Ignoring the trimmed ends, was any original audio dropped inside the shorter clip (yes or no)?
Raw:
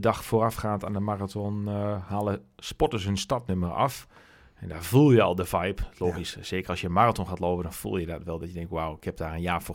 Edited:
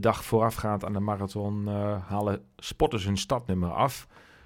no